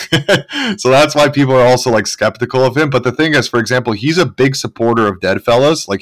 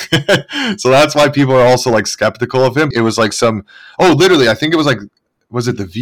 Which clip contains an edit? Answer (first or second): second